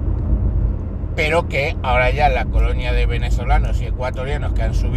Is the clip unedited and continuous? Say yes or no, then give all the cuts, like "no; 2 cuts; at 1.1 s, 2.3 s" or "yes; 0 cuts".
yes; 0 cuts